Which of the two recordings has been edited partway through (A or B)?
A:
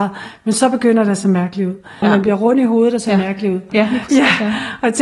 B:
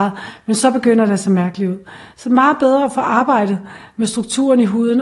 A